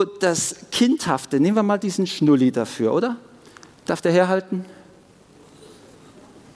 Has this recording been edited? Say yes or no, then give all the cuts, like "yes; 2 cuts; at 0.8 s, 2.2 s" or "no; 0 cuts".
no; 0 cuts